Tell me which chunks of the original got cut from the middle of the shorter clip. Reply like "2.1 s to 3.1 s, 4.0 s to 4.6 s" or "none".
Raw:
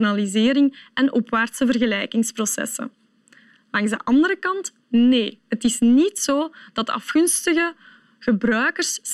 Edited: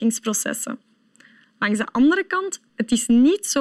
4.8 s to 5.4 s

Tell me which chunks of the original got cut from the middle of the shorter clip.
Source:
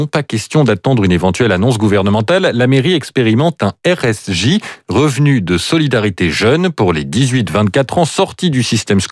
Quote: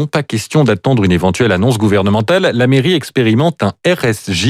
none

